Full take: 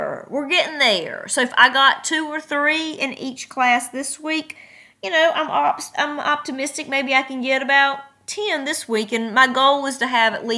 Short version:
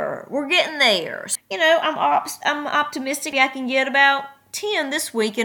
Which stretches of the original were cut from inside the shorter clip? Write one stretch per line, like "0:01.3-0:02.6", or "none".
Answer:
0:01.4-0:04.9
0:06.9-0:07.1